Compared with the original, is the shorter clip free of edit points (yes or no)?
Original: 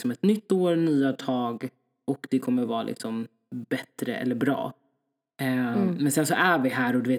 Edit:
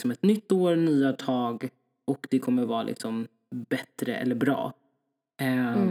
yes